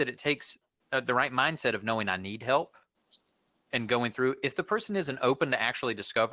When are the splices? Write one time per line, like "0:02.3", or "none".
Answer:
none